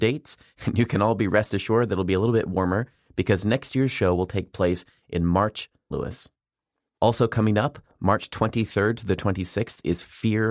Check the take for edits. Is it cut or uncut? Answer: cut